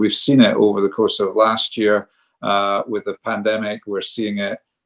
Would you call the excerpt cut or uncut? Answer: uncut